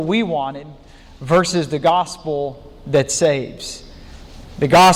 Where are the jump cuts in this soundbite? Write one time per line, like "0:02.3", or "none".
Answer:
none